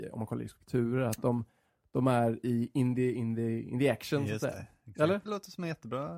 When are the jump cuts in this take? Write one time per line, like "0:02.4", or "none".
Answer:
0:05.3